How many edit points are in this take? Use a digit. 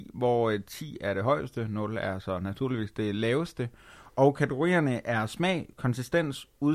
0